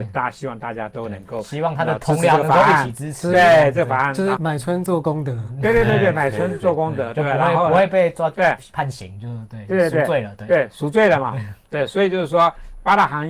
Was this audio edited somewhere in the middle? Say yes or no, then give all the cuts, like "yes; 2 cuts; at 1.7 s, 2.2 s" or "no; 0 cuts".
yes; 2 cuts; at 4.4 s, 8.6 s